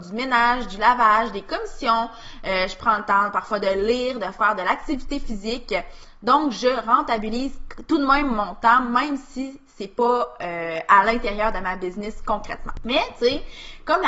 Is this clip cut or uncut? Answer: uncut